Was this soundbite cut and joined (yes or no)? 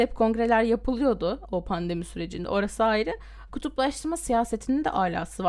yes